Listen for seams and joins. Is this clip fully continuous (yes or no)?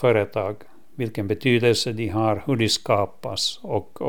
yes